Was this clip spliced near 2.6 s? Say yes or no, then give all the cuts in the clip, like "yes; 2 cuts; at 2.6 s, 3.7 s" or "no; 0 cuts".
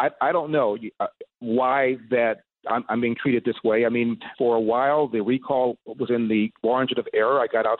no; 1 cut; at 4.3 s